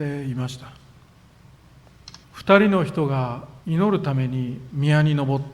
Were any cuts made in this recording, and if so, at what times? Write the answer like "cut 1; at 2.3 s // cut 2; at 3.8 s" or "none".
cut 1; at 2.2 s // cut 2; at 3.6 s